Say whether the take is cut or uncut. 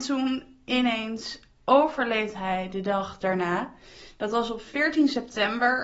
uncut